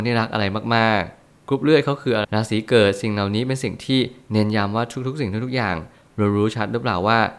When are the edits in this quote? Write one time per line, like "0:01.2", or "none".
0:02.2